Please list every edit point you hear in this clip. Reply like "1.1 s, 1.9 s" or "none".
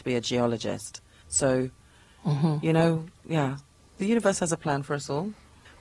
1.2 s